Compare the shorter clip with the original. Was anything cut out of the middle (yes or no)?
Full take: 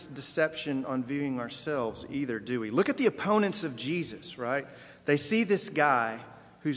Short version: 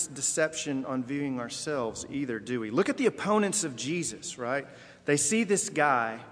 no